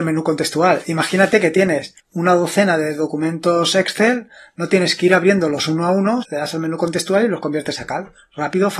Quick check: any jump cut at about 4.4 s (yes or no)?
no